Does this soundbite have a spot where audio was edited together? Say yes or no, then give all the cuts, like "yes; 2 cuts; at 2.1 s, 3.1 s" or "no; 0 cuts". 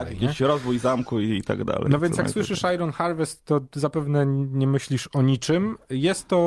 no; 0 cuts